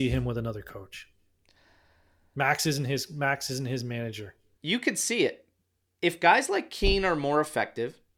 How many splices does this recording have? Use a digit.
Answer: 1